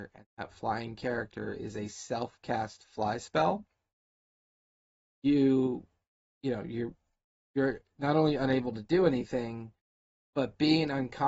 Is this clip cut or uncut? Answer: uncut